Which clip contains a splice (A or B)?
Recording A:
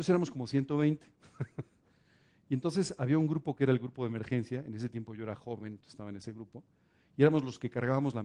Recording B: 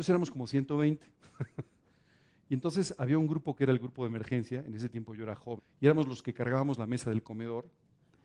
B